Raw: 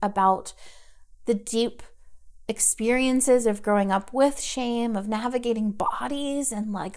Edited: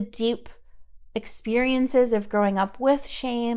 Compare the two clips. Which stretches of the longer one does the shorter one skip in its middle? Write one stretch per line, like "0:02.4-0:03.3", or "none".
none